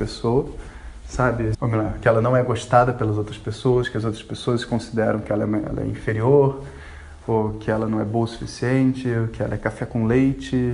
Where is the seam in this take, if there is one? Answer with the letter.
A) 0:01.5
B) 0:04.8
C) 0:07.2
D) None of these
A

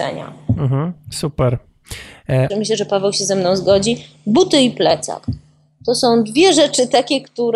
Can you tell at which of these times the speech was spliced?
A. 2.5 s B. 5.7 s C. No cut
A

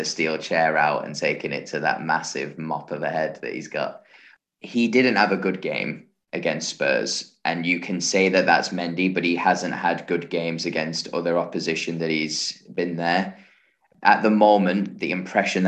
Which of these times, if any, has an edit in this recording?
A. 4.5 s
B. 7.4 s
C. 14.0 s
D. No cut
D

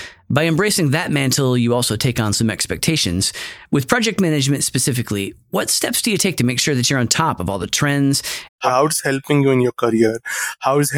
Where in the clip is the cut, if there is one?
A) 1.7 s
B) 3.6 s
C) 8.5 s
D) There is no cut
C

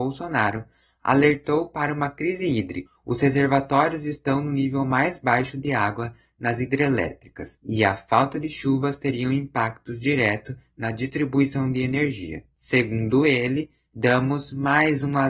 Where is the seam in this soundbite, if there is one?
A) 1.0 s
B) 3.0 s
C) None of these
C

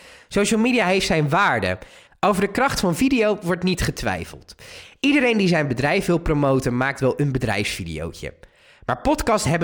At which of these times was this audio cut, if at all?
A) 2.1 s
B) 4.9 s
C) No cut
A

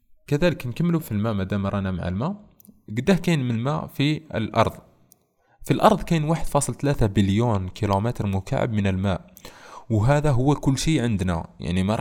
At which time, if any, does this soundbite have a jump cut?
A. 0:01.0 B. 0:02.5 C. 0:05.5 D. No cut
A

